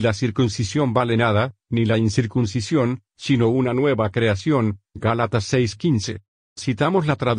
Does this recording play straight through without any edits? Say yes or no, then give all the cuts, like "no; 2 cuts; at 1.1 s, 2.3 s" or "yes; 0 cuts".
yes; 0 cuts